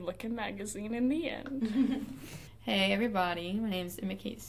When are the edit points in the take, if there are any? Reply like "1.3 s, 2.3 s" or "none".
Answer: none